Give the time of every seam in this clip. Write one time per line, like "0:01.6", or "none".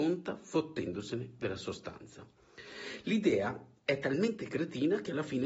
none